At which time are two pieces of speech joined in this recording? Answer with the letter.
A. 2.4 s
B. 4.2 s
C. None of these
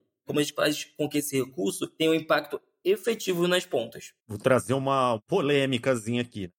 B